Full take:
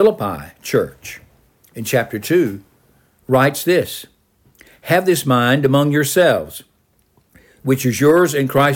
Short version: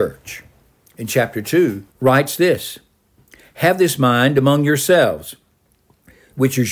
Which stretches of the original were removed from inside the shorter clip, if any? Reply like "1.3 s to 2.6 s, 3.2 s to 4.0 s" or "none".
2.7 s to 3.2 s